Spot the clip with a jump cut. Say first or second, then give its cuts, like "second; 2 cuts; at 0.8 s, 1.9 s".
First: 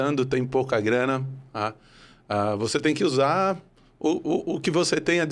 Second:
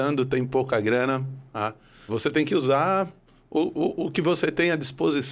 second; 1 cut; at 2.1 s